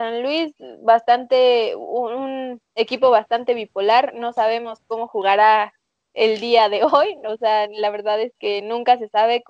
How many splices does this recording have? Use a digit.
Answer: 0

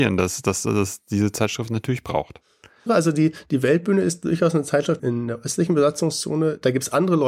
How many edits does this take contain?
2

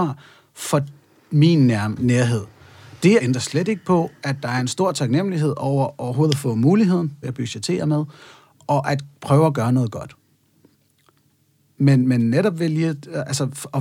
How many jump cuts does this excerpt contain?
2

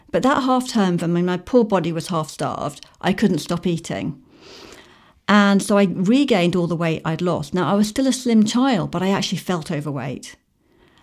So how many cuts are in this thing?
1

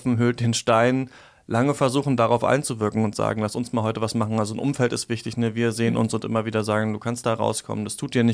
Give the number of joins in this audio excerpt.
0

